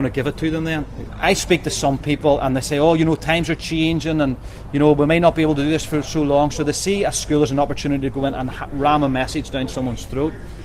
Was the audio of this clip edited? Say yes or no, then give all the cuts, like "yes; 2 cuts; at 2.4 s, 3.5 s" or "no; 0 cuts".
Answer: yes; 1 cut; at 1.1 s